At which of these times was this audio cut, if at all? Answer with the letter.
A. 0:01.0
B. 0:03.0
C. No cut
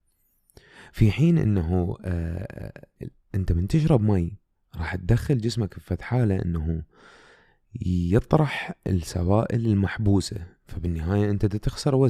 B